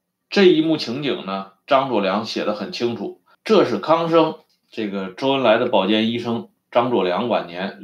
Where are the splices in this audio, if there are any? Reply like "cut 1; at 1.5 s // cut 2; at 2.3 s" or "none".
cut 1; at 3.3 s // cut 2; at 4.5 s